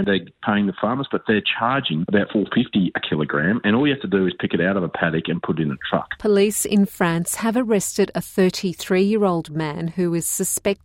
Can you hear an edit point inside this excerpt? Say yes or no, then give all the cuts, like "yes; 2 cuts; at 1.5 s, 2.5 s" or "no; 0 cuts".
yes; 1 cut; at 2.3 s